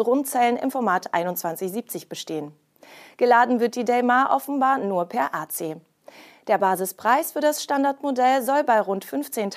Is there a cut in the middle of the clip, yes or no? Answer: no